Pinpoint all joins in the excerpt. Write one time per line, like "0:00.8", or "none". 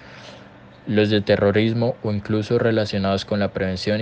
none